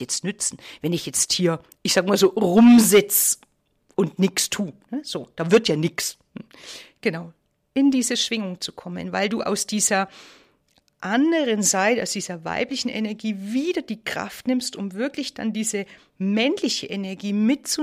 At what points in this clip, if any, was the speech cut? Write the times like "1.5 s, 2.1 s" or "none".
none